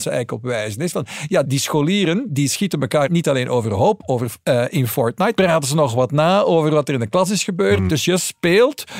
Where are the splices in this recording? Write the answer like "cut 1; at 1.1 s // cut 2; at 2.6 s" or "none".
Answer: cut 1; at 5.4 s // cut 2; at 7.9 s